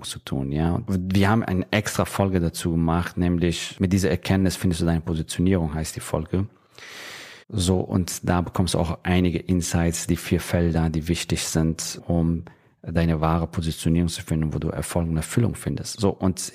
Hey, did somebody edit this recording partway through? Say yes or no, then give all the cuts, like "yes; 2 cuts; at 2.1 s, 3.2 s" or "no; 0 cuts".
yes; 1 cut; at 7.4 s